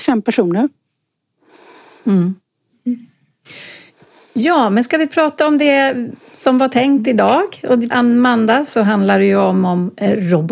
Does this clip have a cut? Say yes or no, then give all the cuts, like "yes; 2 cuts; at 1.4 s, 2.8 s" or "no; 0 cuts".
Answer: yes; 1 cut; at 7.9 s